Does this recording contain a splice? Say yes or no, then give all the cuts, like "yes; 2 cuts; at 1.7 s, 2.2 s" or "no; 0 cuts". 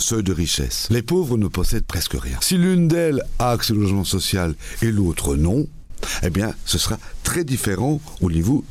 yes; 1 cut; at 2.4 s